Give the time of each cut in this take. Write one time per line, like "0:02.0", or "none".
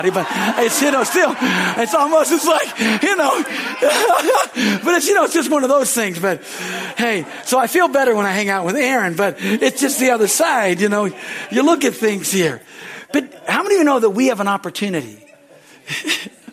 none